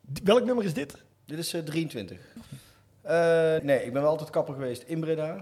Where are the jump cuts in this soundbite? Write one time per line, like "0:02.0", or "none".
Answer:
0:01.1
0:02.4
0:03.6